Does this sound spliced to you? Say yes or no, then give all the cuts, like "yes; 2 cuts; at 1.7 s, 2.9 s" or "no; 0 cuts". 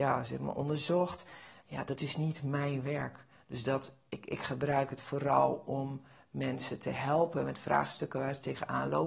no; 0 cuts